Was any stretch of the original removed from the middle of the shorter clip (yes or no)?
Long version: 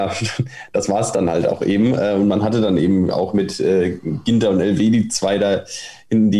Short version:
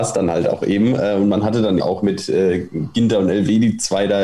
yes